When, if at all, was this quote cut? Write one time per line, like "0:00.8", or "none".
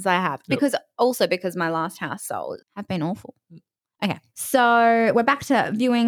0:02.6
0:04.3